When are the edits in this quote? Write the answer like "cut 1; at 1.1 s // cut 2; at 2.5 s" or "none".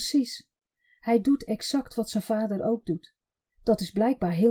none